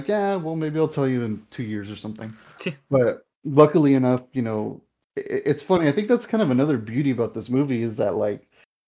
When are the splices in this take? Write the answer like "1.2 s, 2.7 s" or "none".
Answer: none

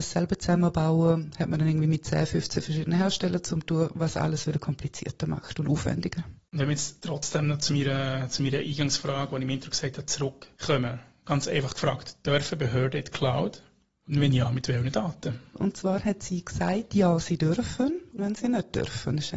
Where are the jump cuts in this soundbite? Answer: 15.6 s, 18.2 s

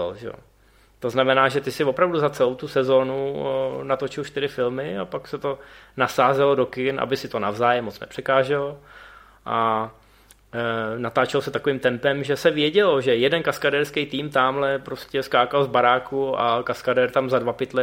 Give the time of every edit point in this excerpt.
none

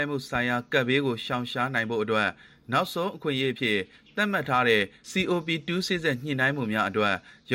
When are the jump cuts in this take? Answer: 5.9 s

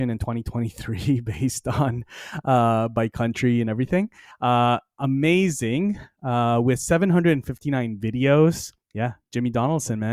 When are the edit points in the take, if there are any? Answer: 4.3 s, 8.8 s

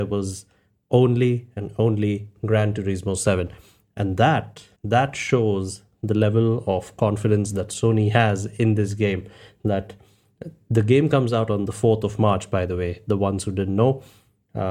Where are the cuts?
4.8 s

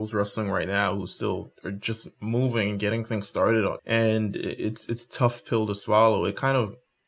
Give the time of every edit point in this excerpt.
3.8 s

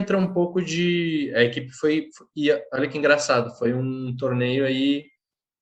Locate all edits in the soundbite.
none

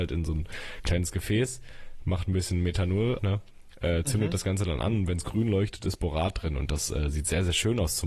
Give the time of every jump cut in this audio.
3.2 s

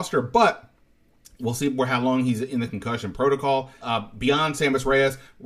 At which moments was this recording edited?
3.8 s

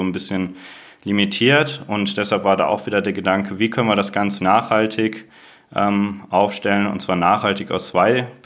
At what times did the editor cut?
4.4 s

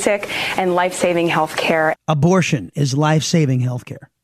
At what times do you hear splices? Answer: 2.0 s

